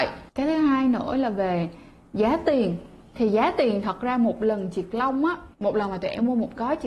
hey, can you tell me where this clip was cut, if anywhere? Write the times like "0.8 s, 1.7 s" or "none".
5.5 s

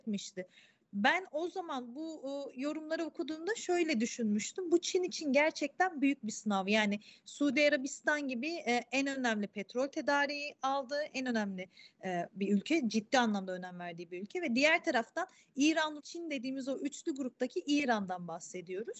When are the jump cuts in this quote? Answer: 16.0 s

